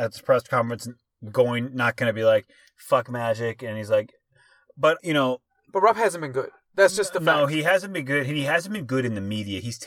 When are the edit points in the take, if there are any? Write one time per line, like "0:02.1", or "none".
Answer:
0:05.0